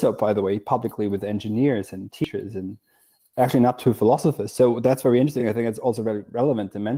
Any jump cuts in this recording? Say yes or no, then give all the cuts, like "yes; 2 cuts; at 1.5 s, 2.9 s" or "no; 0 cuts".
no; 0 cuts